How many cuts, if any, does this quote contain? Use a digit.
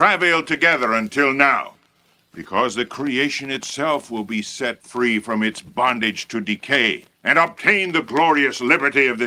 2